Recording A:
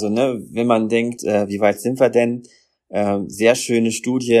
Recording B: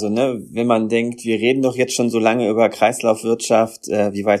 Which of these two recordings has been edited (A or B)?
A